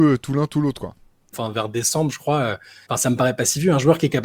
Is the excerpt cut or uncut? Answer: cut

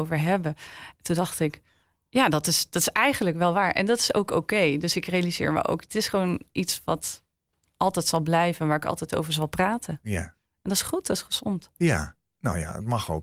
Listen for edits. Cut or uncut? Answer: uncut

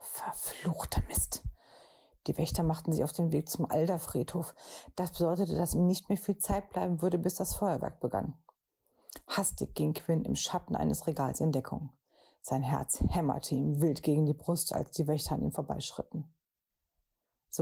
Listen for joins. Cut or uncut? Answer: uncut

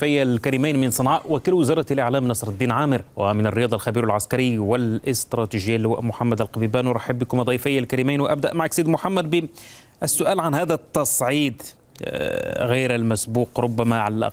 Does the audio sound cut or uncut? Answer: cut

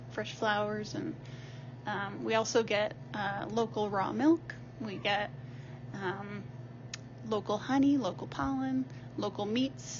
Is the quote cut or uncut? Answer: uncut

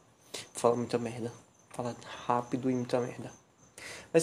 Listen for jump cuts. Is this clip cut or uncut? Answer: uncut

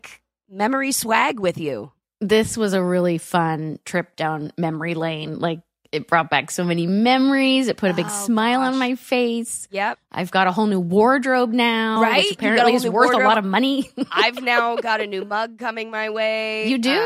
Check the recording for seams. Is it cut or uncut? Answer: uncut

